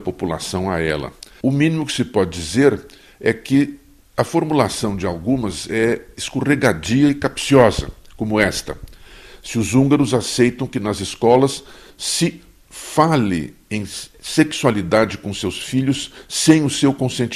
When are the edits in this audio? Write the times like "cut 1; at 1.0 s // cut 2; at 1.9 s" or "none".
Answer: cut 1; at 1.4 s // cut 2; at 11.9 s